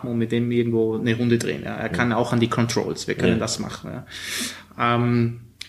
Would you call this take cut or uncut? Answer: uncut